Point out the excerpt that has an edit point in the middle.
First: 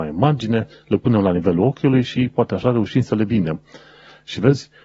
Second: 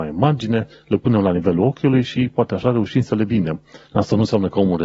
second; 1 cut; at 3.8 s

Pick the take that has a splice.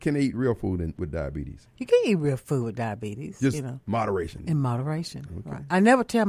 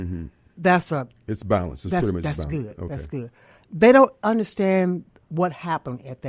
second; 1 cut; at 3.6 s

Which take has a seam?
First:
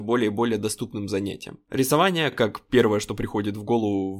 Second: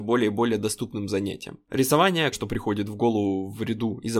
second; 1 cut; at 2.3 s

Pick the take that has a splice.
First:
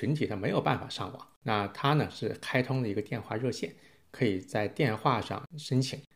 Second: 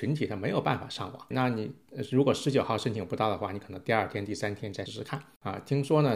second; 2 cuts; at 1.3 s, 4.9 s

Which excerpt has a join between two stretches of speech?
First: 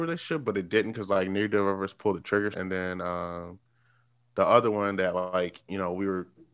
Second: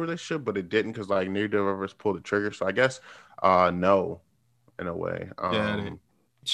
first; 1 cut; at 2.5 s

